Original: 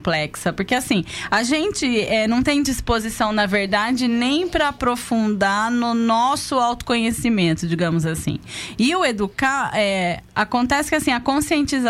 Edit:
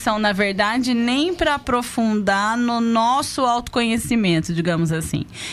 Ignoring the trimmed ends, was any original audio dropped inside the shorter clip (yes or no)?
no